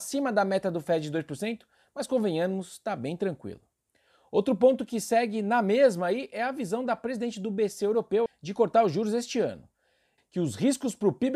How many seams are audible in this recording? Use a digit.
2